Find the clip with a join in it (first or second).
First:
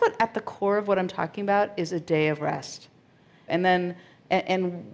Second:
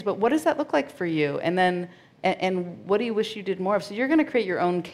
first